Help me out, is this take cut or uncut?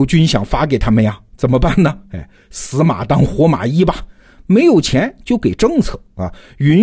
uncut